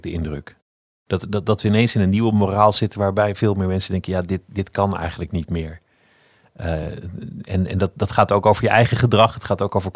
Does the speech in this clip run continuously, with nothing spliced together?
yes; 0 cuts

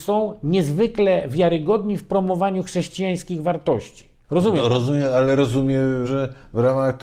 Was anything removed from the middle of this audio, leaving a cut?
yes; 2 cuts; at 4.2 s, 6.0 s

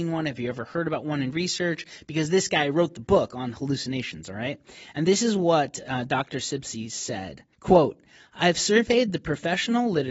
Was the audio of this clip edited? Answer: yes; 1 cut; at 7.5 s

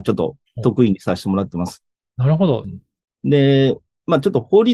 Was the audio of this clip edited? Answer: yes; 1 cut; at 2.6 s

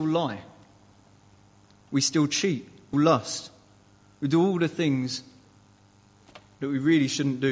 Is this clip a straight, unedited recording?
no; 1 cut; at 2.9 s

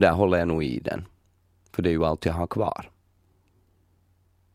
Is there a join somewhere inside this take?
no; 0 cuts

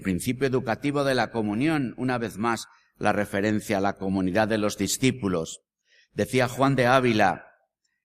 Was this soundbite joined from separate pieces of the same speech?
no; 0 cuts

